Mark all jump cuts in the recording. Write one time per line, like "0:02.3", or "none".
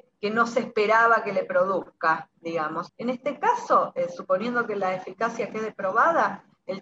0:02.9